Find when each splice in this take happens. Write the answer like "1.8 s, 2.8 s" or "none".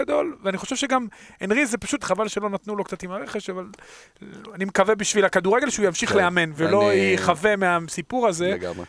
2.0 s